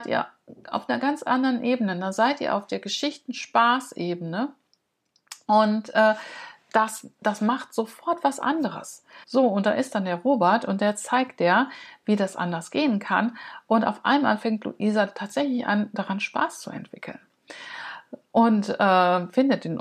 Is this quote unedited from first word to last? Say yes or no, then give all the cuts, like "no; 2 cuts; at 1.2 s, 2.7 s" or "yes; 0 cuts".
no; 1 cut; at 9.2 s